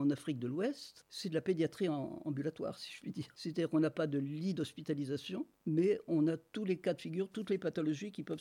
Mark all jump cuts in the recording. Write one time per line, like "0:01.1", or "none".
none

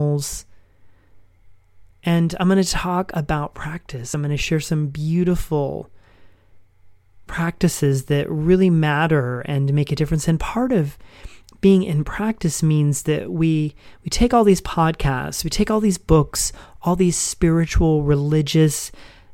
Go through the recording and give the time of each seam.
none

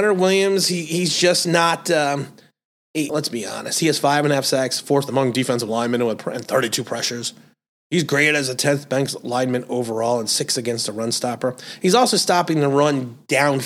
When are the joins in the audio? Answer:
0:03.1

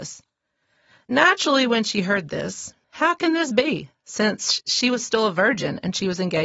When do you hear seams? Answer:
0:02.8

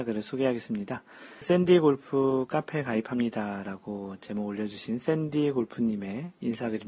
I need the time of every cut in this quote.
0:01.4

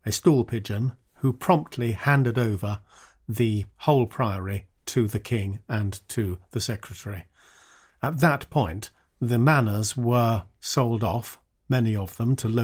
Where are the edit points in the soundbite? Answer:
none

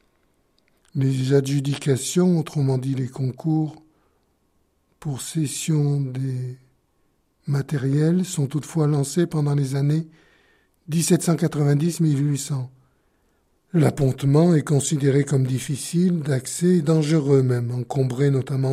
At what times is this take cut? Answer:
0:13.6

